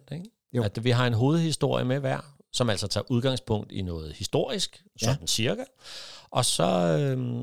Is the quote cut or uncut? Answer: uncut